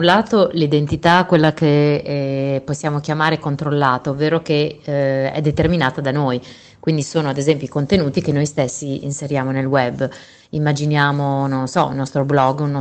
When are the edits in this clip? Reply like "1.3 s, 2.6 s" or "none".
none